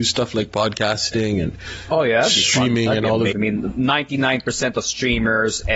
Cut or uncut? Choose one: cut